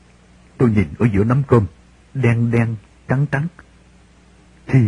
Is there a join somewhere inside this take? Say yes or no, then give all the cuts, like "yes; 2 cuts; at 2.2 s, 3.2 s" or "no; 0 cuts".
yes; 1 cut; at 2.1 s